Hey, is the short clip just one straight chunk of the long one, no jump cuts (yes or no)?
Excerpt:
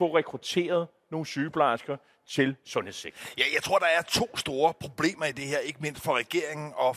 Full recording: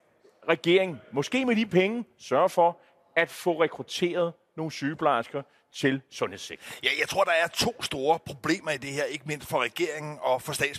yes